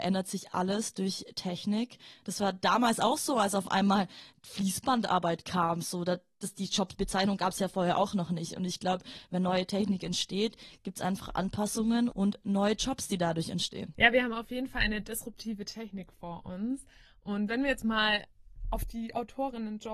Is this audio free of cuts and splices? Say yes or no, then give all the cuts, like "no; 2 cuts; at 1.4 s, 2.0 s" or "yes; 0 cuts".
yes; 0 cuts